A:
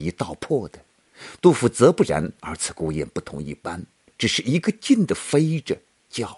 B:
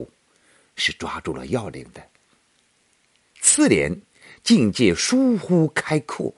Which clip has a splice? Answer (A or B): A